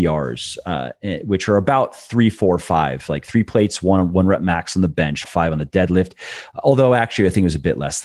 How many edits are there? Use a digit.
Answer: 1